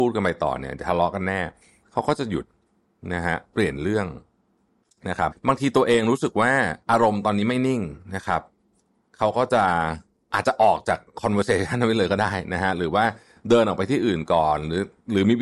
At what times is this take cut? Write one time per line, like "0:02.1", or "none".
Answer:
0:05.3
0:06.8